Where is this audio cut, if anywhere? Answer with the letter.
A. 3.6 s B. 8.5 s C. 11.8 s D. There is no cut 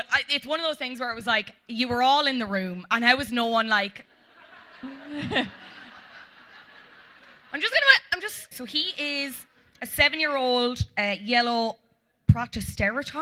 B